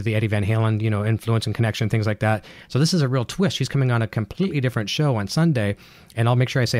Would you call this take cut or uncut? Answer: uncut